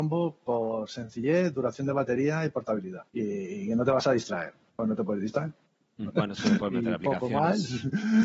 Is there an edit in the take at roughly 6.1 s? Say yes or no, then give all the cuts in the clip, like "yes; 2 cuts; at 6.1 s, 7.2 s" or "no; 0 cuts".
yes; 2 cuts; at 3.1 s, 6.1 s